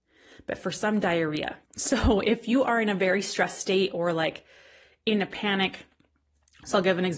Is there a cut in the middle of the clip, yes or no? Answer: yes